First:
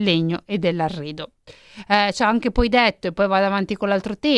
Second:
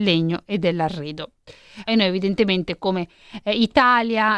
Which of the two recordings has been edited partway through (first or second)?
second